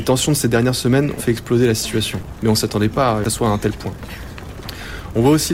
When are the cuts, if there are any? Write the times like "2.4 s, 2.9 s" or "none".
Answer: 1.2 s